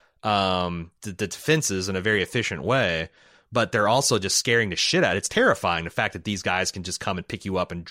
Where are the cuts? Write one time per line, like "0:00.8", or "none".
0:01.0